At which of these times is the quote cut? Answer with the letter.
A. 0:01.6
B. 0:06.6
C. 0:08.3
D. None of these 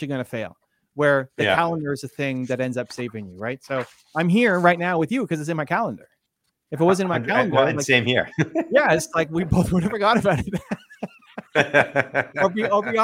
D